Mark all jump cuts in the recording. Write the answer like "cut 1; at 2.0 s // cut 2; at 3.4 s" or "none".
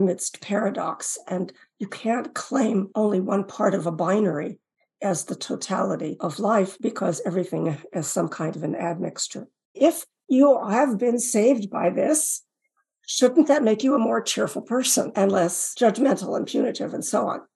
cut 1; at 9.7 s